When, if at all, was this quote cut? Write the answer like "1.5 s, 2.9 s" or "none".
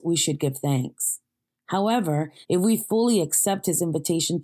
2.4 s